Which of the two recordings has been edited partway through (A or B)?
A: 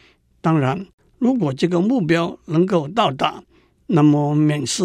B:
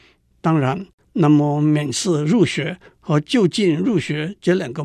B